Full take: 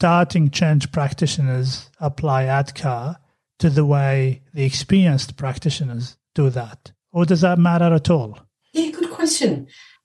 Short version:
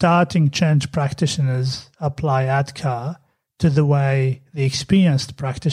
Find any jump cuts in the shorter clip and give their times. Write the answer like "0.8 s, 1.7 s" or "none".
none

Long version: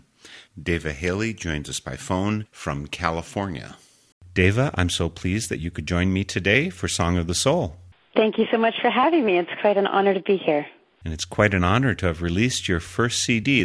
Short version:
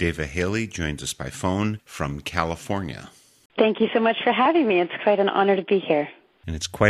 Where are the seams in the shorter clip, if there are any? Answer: 3.5 s

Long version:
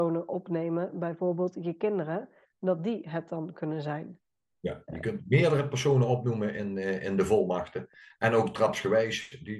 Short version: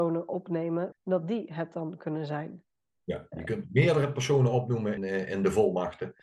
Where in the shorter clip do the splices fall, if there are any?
0.9 s, 5.0 s

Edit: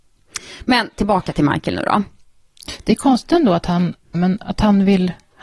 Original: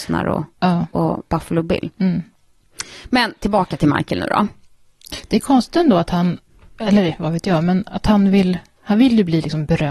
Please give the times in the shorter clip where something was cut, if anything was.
4.1 s

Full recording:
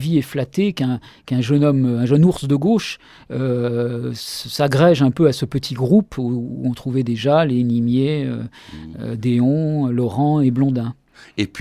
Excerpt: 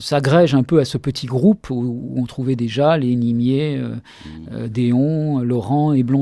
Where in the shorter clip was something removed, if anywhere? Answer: none

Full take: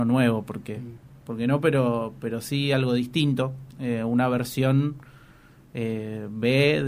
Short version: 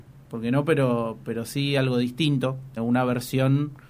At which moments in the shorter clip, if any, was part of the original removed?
2.8 s

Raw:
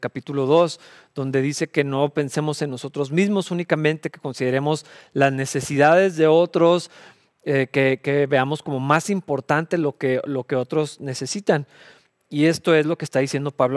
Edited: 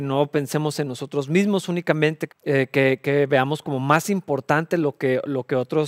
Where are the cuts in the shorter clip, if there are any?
2.3 s

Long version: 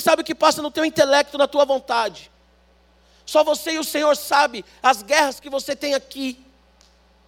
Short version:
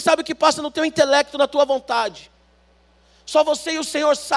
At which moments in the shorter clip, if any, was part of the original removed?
none

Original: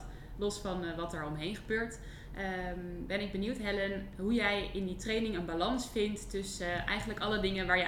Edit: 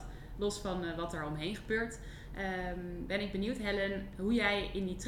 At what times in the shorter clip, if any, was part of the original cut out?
none

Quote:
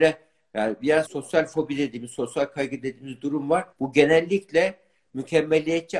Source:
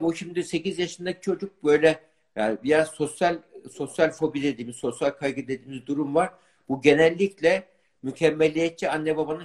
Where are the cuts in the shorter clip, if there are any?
1.1 s, 3.7 s

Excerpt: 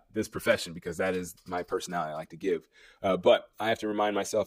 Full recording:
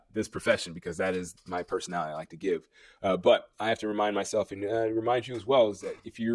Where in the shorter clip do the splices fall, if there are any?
none

